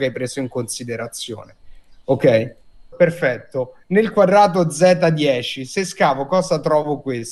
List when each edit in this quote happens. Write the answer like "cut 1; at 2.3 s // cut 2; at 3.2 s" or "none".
cut 1; at 2.9 s